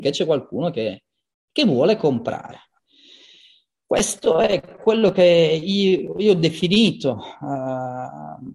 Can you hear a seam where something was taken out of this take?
no; 0 cuts

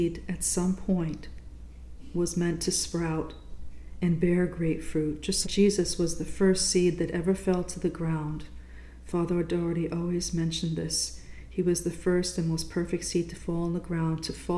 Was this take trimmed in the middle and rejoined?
yes; 1 cut; at 5.4 s

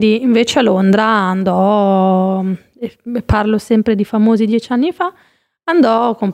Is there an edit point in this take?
no; 0 cuts

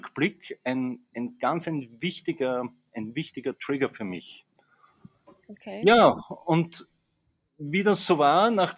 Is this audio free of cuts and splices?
yes; 0 cuts

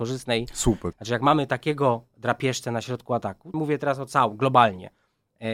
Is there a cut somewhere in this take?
yes; 2 cuts; at 0.9 s, 3.5 s

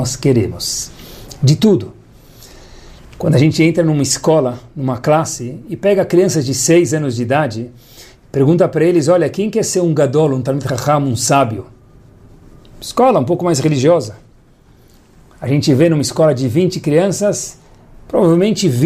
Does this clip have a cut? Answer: no; 0 cuts

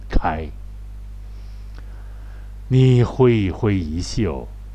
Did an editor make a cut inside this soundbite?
no; 0 cuts

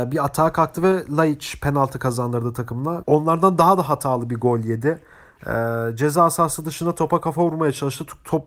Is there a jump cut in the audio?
yes; 1 cut; at 3.0 s

